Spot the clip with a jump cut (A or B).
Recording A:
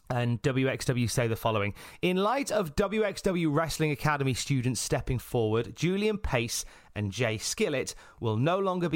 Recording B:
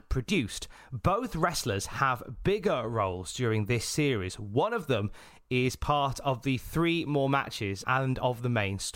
B